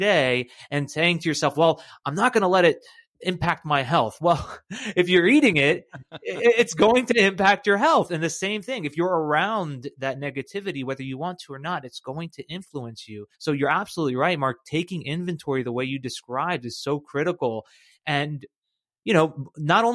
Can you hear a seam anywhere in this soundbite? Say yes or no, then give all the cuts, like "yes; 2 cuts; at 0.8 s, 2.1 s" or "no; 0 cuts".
yes; 1 cut; at 13.3 s